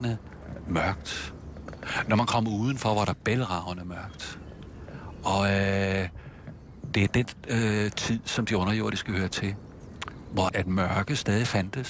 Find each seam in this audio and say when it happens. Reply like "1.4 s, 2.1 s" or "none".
10.5 s